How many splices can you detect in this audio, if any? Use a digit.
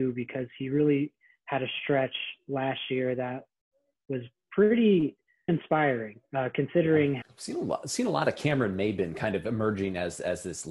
2